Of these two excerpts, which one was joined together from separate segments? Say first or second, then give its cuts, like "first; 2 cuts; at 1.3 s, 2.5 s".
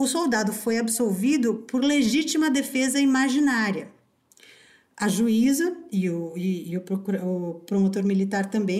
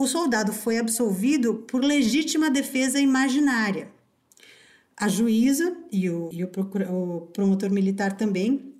second; 1 cut; at 6.3 s